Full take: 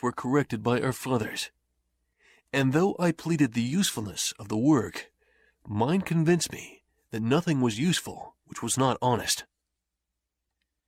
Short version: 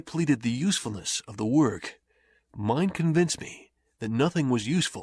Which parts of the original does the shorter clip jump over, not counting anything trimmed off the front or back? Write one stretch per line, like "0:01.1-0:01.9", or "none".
none